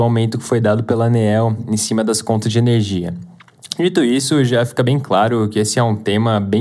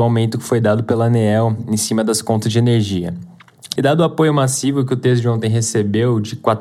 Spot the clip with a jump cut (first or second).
second